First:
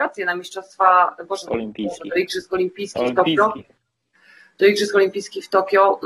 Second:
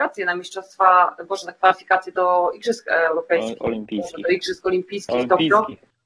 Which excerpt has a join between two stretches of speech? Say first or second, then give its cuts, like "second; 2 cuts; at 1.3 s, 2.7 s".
first; 1 cut; at 1.4 s